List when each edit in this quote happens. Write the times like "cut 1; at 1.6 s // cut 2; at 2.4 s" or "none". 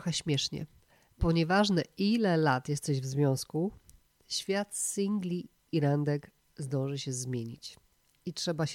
none